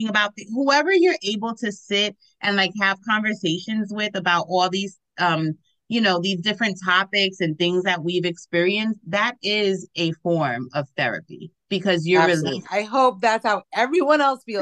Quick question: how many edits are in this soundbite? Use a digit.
1